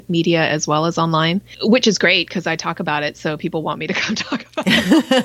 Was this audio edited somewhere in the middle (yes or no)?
yes